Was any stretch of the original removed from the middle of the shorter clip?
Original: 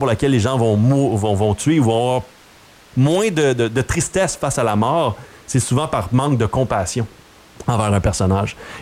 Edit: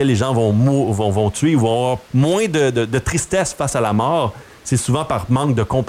yes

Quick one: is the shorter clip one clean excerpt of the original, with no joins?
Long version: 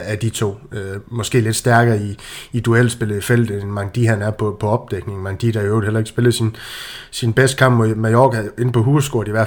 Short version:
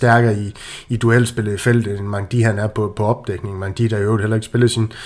yes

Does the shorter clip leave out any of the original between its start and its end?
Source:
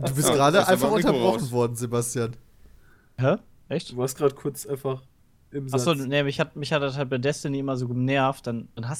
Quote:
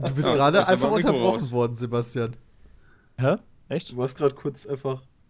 no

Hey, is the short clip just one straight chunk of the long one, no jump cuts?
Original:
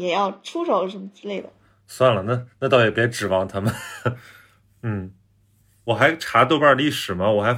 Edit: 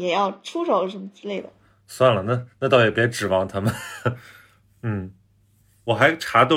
yes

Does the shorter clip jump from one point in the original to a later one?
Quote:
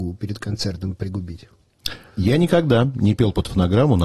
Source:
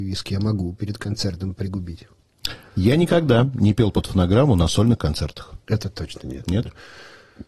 no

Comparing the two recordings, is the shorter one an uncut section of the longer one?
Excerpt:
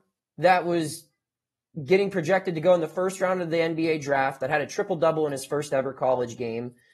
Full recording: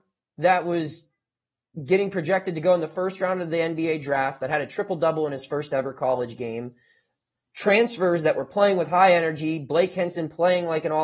yes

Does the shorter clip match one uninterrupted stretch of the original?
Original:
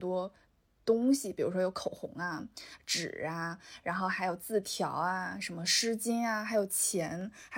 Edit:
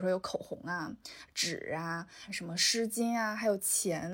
no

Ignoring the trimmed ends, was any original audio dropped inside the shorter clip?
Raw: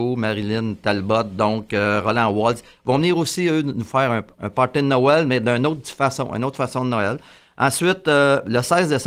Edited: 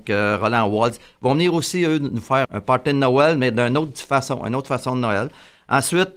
yes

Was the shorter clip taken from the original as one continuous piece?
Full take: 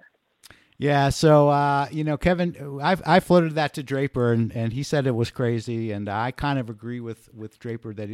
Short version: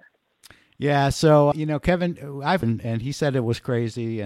no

